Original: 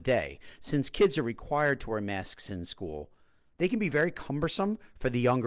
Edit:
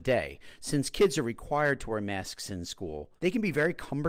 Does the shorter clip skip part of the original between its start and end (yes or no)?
yes